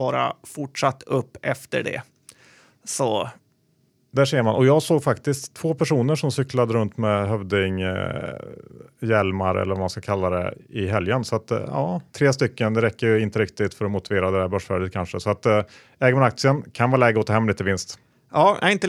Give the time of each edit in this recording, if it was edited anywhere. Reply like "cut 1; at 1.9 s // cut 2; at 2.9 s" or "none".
cut 1; at 12.1 s